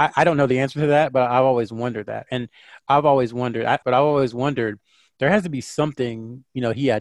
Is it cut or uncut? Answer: cut